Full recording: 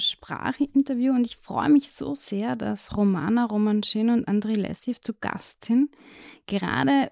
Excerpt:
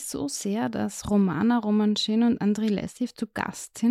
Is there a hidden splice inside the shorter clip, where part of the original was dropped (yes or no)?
no